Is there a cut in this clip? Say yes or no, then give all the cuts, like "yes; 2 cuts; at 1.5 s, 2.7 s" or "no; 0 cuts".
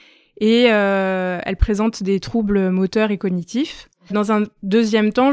no; 0 cuts